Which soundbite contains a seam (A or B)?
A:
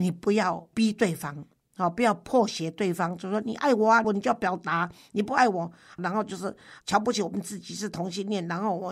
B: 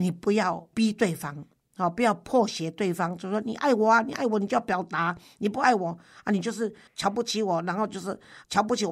A